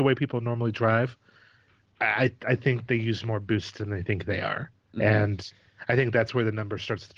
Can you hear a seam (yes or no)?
no